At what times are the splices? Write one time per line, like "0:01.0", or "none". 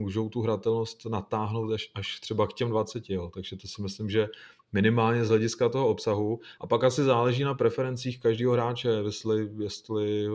none